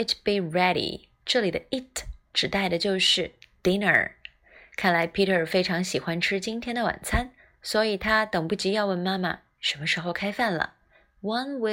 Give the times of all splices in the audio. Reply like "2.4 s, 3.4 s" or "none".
none

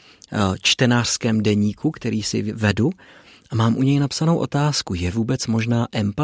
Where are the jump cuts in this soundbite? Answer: none

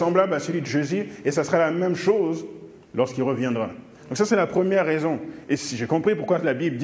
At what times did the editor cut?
none

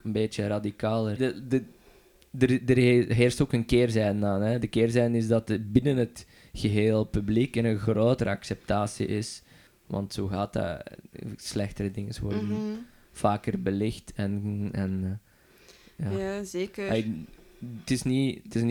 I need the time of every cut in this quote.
1.2 s, 9.7 s

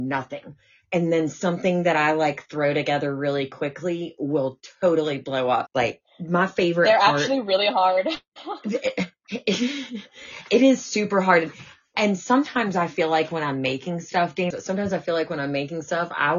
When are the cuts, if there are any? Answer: 5.7 s, 14.5 s

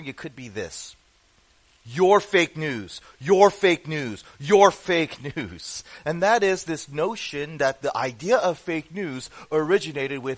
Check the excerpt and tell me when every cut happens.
6.0 s

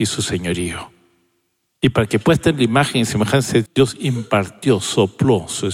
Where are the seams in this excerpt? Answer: 3.7 s

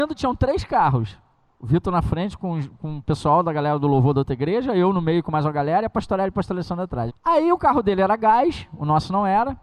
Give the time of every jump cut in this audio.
7.1 s

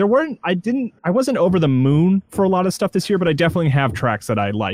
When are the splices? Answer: 1.0 s

